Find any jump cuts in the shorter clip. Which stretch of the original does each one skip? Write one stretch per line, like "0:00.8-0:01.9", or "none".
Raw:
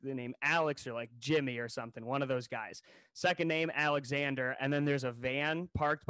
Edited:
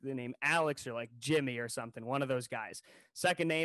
none